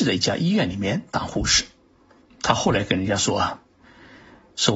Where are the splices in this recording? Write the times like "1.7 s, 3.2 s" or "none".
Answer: 2.2 s